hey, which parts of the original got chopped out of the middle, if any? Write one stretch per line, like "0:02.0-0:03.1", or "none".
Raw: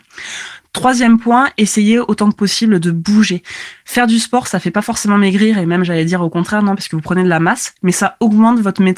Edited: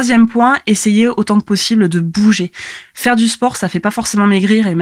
none